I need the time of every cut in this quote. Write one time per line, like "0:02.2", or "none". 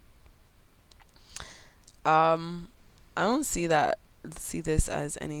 none